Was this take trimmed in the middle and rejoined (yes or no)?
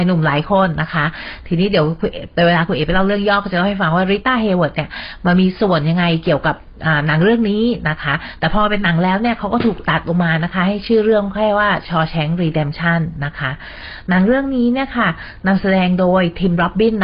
no